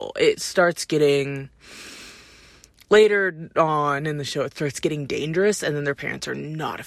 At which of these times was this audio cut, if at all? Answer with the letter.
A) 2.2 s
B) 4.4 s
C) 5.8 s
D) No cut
D